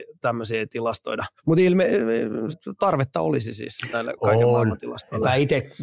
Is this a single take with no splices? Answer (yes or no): no